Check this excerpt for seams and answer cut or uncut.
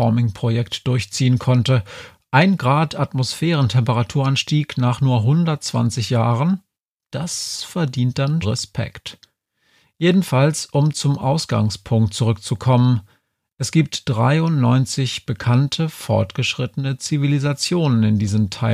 cut